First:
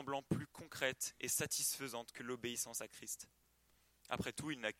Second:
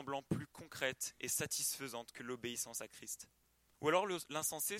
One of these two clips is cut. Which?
second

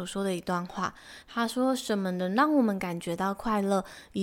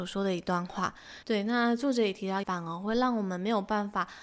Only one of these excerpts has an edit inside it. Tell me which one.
second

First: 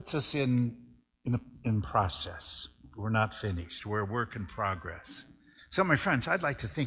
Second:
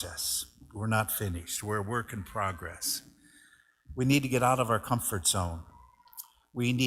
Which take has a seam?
first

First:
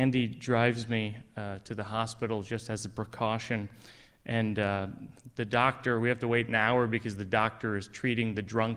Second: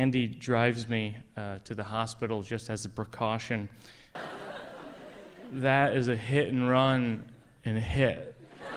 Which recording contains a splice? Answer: second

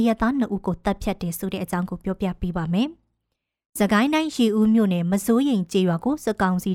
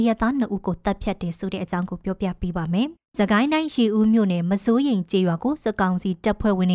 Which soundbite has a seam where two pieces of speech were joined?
second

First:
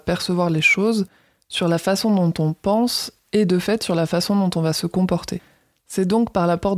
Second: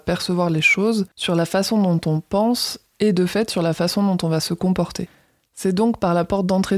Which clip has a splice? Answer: second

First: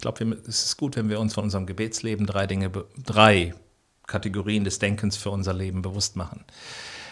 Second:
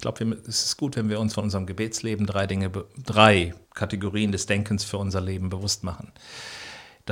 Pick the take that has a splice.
second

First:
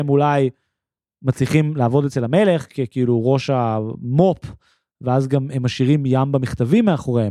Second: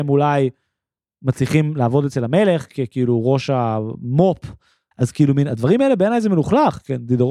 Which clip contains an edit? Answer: second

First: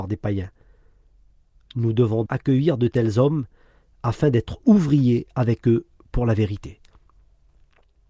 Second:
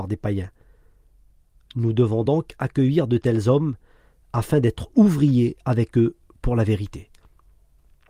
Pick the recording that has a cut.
first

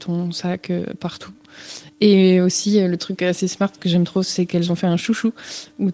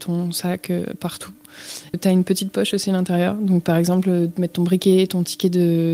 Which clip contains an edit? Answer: second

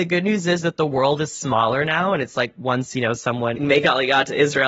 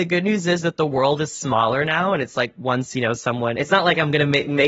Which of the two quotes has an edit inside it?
first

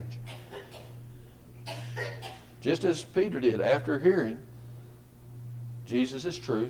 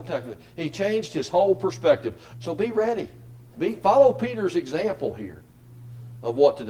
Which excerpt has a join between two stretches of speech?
second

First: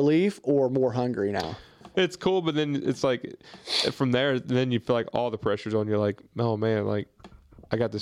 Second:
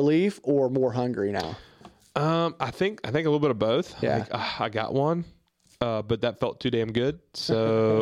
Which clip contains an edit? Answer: first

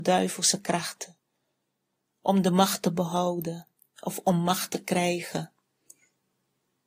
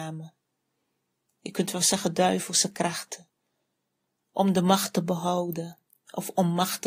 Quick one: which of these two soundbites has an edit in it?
second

